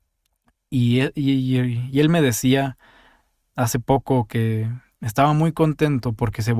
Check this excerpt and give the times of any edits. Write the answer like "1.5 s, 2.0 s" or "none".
none